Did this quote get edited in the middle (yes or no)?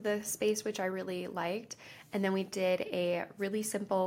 no